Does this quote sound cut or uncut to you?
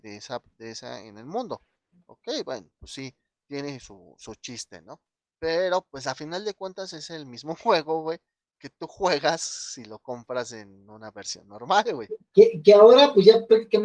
uncut